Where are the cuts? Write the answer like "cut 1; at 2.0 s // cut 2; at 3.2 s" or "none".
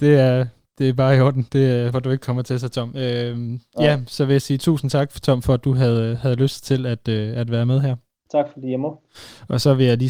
cut 1; at 1.9 s // cut 2; at 8.3 s